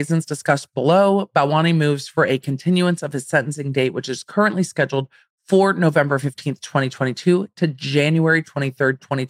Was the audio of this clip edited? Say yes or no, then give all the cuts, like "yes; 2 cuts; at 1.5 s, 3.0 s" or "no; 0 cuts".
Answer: no; 0 cuts